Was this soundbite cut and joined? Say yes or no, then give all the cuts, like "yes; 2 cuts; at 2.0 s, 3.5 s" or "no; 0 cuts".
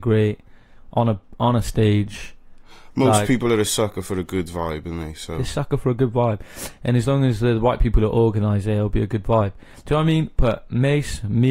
no; 0 cuts